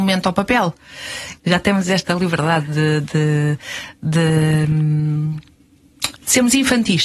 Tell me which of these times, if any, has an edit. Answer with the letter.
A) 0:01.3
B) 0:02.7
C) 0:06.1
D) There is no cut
A